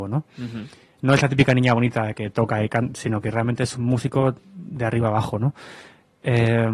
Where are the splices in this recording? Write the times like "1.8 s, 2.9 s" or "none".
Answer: none